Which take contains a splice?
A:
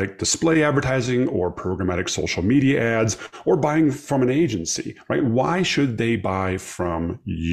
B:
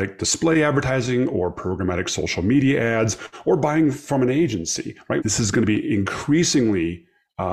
B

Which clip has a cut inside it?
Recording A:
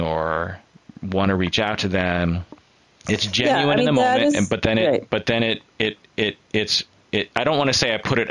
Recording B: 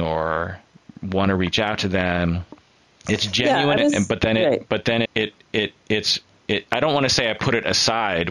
B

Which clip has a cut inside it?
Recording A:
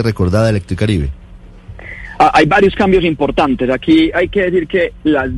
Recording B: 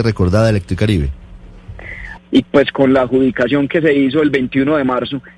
B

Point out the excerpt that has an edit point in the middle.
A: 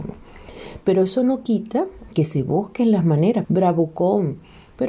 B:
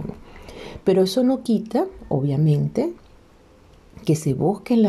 A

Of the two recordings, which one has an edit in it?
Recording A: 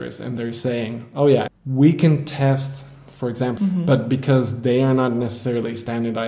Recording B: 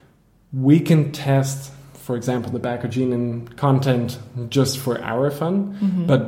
A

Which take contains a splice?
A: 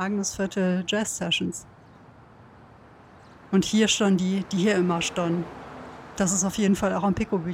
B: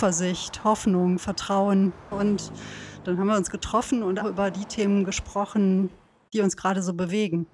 B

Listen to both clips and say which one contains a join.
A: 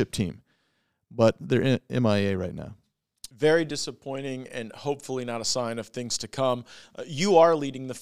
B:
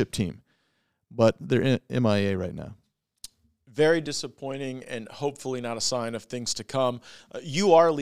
A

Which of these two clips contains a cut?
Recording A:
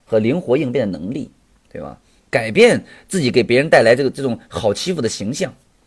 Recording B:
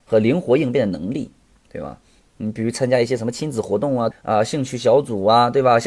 B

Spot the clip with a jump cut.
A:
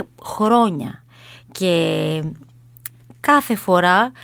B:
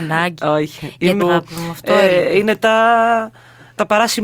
B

